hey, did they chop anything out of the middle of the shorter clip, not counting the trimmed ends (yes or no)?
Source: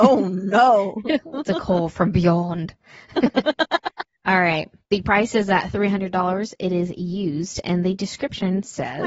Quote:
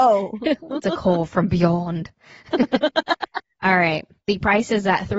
no